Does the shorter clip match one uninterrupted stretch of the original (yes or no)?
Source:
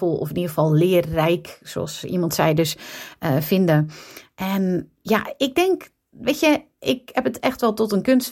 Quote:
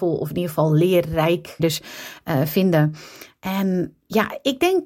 no